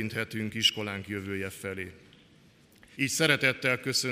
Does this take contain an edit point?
yes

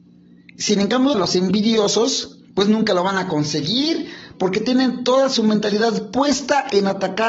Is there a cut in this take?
yes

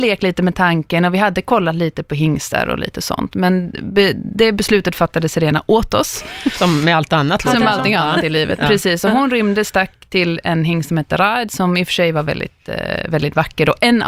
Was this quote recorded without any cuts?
yes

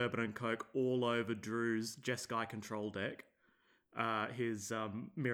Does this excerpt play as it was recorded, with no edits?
yes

